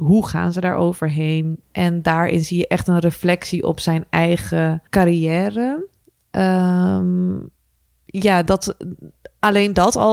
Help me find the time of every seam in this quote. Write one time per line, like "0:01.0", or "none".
0:01.6
0:04.9